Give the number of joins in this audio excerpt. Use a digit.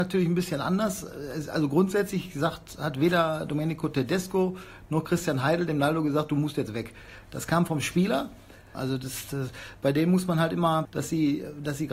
2